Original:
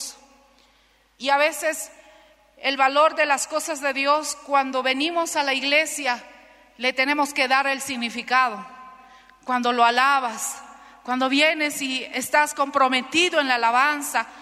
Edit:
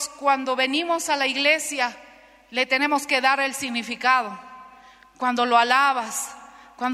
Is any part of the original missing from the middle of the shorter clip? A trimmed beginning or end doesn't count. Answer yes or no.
no